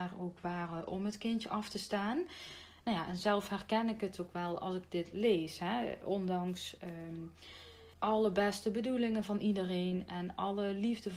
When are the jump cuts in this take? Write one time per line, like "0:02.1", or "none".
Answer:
0:02.8
0:07.9